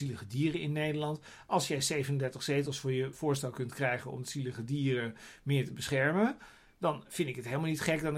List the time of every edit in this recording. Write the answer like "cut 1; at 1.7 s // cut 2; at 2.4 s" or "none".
cut 1; at 3.1 s